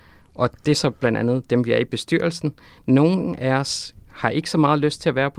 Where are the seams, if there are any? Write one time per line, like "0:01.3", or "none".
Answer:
none

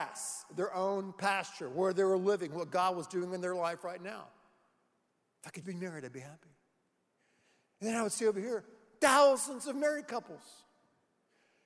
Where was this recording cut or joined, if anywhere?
0:05.6

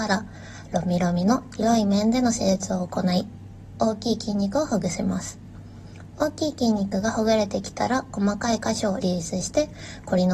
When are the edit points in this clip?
0:09.0

